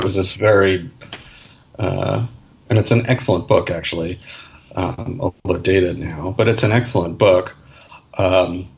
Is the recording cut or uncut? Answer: uncut